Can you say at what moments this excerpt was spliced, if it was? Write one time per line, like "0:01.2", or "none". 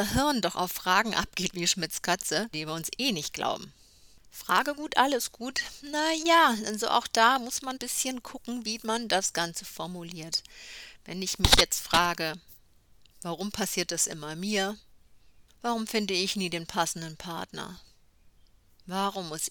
0:02.5
0:07.8
0:15.5